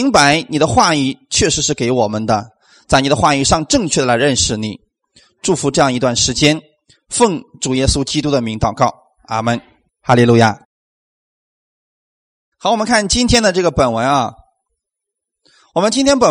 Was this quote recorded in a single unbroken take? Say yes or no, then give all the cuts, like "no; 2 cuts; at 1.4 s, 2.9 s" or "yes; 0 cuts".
yes; 0 cuts